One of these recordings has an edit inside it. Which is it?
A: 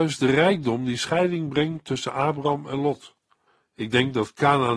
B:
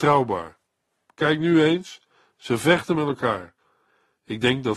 A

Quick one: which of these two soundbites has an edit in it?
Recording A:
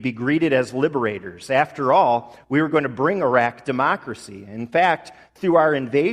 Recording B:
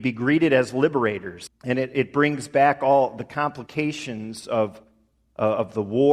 B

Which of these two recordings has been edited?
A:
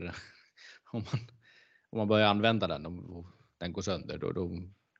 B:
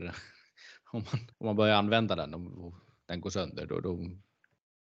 B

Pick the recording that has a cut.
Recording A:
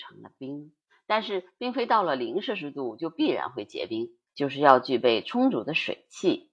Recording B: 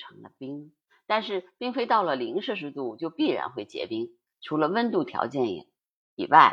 A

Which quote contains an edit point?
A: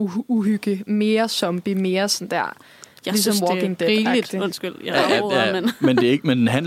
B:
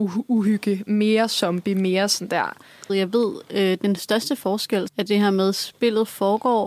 B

